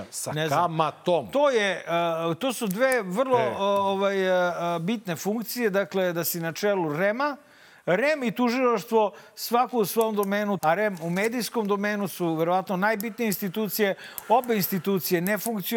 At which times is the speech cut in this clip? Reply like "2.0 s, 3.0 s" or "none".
10.6 s